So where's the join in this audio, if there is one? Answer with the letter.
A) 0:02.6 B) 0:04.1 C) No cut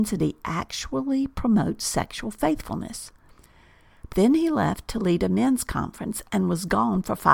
B